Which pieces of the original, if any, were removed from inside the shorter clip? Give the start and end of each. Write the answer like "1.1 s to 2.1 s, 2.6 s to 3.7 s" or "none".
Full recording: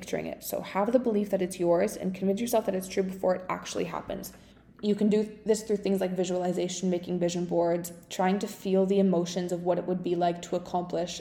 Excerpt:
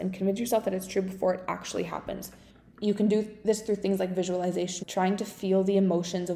6.8 s to 8.0 s

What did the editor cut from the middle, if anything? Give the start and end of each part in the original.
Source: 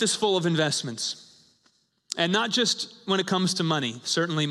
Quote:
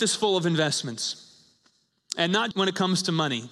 2.5 s to 3.0 s

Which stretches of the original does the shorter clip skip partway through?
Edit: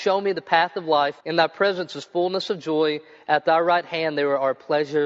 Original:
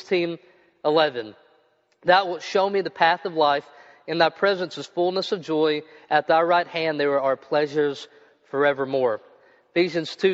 3.7 s to 4.0 s

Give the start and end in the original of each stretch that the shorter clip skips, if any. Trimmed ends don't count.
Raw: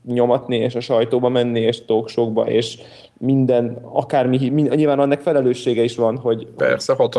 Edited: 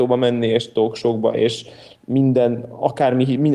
none

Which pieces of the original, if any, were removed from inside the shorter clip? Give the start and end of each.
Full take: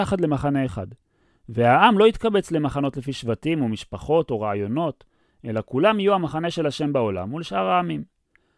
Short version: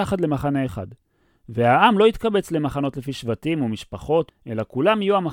4.3 s to 5.3 s

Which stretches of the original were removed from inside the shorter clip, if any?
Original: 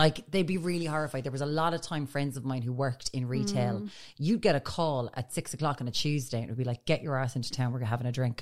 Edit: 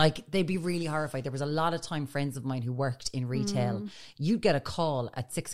none

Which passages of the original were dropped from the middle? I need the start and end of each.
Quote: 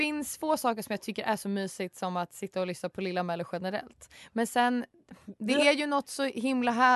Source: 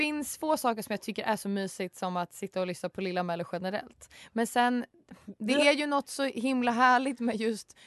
none

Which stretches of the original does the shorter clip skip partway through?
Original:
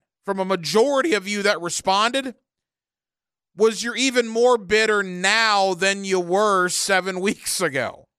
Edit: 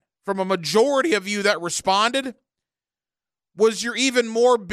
none

